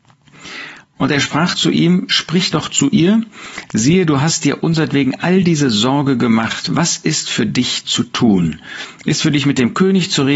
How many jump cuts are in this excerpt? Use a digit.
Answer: 1